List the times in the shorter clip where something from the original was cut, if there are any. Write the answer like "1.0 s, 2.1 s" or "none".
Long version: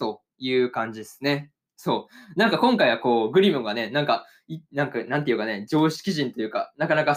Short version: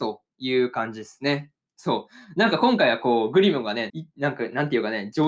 3.9 s